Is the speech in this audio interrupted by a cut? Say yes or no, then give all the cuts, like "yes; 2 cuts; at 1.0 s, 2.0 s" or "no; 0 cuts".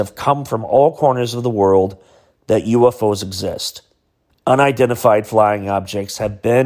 yes; 1 cut; at 4.3 s